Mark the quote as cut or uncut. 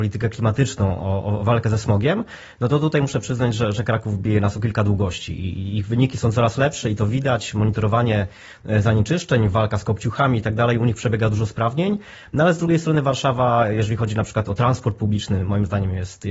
cut